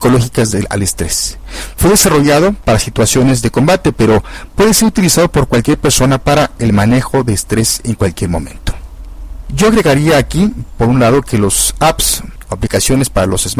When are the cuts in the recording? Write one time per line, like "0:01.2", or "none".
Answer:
none